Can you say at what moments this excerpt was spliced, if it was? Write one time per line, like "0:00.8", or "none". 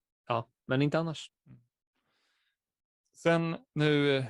0:01.3